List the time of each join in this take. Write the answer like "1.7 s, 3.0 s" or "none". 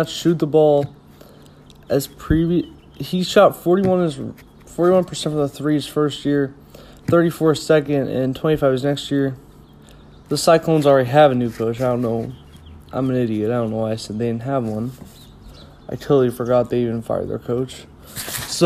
10.2 s

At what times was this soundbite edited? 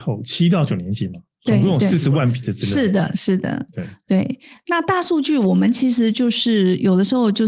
none

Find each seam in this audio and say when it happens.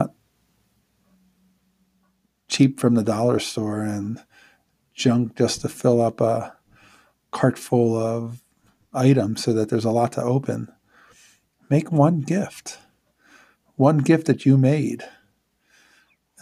none

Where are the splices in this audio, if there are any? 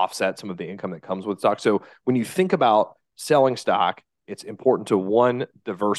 none

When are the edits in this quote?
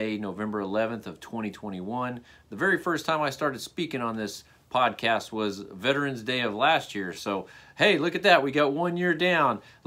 none

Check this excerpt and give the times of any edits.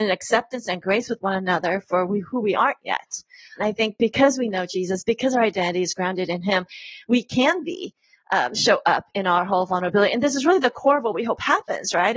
3.6 s

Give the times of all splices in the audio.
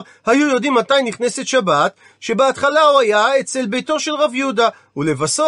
2.1 s

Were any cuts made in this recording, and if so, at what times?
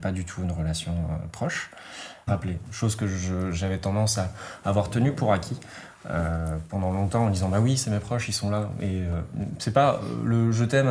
2.3 s

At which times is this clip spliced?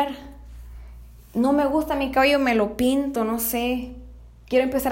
none

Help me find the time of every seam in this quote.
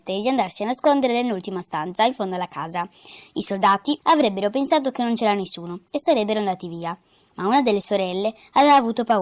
4.0 s

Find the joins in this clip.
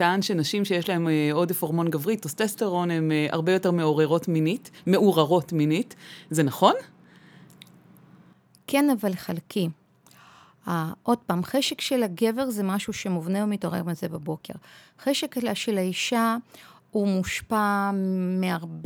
none

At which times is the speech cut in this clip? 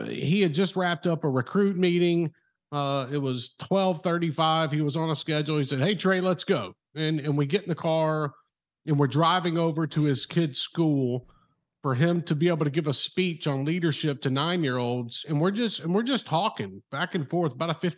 none

